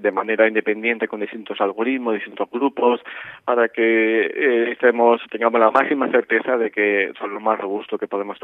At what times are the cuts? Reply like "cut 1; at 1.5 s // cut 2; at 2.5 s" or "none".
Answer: cut 1; at 5.2 s // cut 2; at 7.1 s